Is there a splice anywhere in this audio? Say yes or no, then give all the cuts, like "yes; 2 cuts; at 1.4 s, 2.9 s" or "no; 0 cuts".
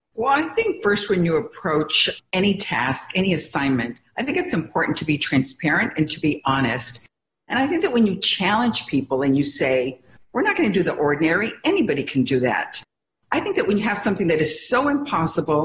yes; 1 cut; at 7.4 s